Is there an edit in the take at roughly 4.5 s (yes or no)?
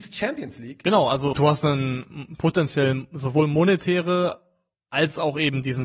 no